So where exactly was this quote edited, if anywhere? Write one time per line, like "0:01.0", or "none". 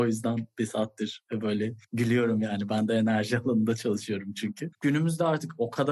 0:04.7